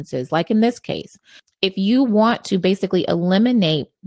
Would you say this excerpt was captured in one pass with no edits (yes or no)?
yes